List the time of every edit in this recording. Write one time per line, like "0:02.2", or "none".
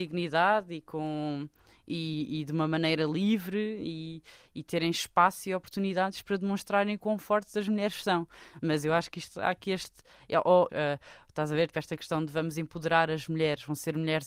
0:10.7
0:11.7